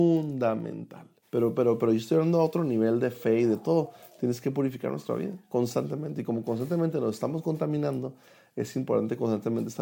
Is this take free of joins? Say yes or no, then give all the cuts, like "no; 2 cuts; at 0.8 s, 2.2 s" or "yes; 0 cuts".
no; 1 cut; at 1.2 s